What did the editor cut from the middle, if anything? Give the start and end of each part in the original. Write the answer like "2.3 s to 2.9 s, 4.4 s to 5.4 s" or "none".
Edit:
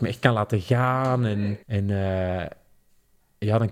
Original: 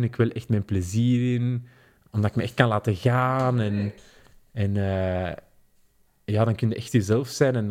4.0 s to 4.5 s